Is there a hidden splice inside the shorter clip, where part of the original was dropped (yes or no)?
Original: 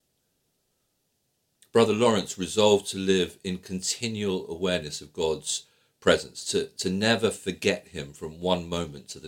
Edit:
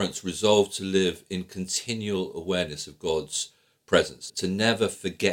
yes